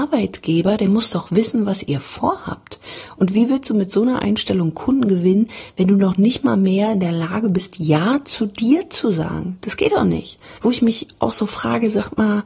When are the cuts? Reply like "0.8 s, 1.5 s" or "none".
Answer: 10.6 s